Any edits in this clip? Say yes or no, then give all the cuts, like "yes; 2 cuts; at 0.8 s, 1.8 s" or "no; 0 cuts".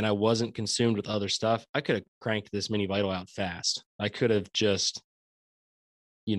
no; 0 cuts